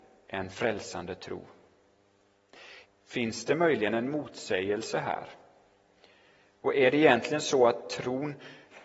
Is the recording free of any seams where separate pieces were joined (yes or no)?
no